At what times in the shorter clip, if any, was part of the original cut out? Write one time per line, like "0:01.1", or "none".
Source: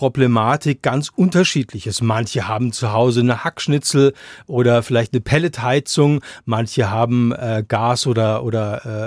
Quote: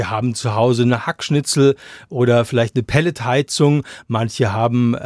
none